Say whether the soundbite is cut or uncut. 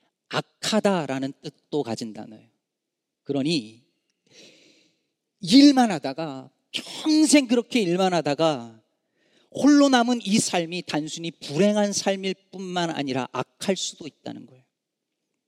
uncut